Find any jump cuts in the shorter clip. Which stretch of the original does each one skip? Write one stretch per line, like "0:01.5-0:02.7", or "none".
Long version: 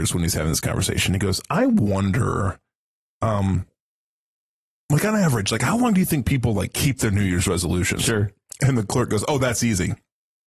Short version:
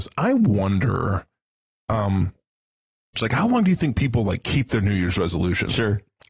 0:04.5-0:05.5